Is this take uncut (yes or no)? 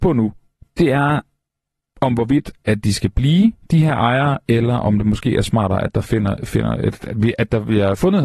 yes